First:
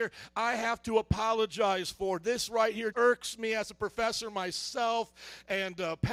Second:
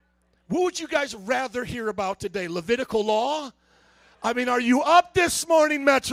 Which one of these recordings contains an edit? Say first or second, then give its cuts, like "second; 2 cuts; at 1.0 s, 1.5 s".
first; 1 cut; at 2.9 s